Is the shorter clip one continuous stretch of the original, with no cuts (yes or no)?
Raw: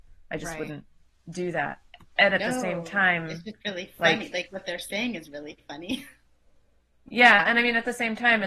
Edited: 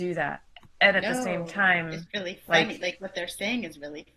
no